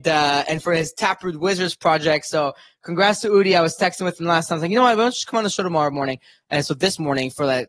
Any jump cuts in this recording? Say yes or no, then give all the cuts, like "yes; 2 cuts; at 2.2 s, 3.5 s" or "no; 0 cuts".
no; 0 cuts